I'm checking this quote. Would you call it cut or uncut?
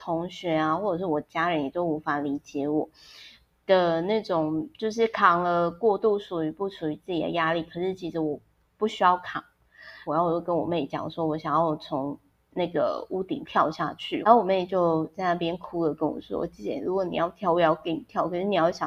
cut